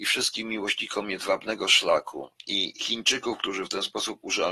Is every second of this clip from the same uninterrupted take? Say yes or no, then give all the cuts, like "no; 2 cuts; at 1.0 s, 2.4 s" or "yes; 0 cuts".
no; 1 cut; at 2.4 s